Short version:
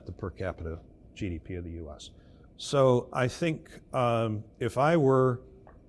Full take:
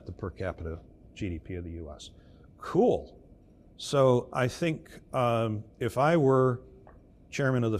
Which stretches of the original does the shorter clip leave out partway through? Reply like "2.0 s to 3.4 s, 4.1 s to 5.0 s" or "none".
2.5 s to 3.7 s